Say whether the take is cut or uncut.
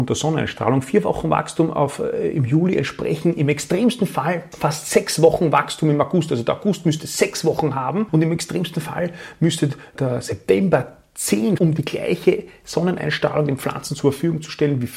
cut